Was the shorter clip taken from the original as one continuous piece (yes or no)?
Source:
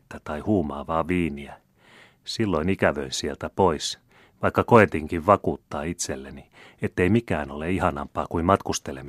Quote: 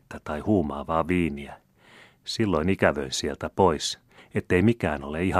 no